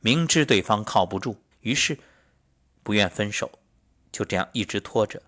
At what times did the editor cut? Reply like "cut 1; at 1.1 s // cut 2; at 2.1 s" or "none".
cut 1; at 1.5 s